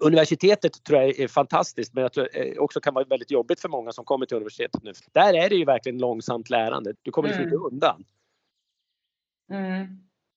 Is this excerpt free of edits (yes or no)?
no